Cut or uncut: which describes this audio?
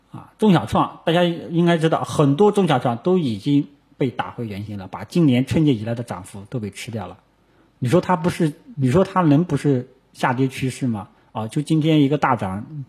uncut